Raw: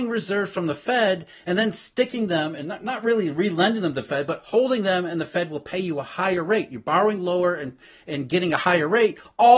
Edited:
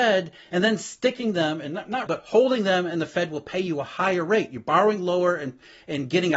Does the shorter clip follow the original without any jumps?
no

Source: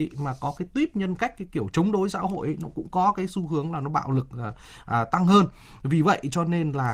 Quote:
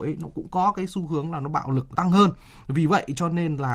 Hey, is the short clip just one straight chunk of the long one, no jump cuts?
no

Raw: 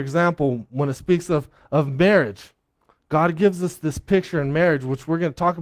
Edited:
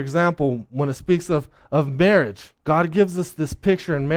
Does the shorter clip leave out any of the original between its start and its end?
yes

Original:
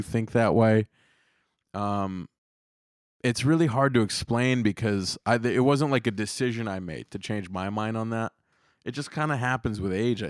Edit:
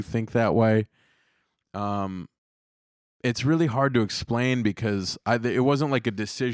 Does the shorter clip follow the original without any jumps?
yes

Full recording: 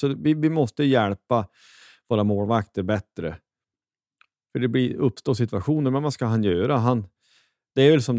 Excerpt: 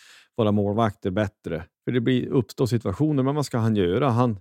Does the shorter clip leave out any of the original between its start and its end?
yes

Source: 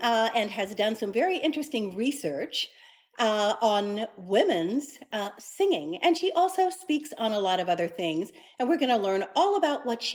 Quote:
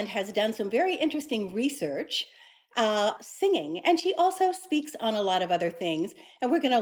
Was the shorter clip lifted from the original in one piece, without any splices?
no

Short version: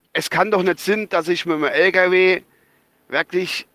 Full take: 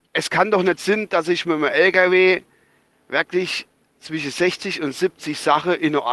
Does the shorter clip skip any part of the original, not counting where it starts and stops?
no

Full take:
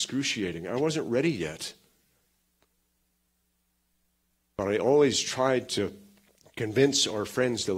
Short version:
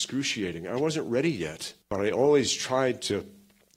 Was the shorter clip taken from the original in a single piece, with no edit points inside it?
no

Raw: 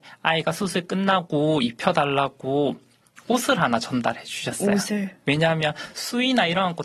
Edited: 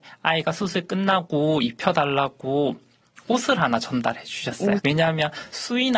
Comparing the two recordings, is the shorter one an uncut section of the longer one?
no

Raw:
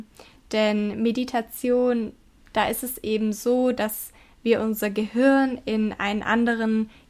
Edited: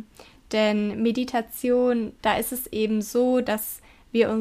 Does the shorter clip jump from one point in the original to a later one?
yes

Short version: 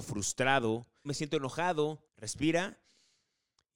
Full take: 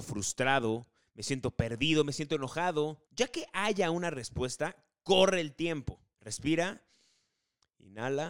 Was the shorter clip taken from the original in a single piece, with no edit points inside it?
no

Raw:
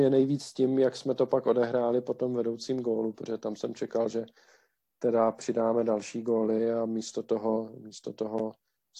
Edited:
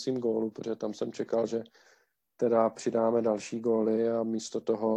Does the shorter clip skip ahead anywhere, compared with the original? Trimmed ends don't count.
no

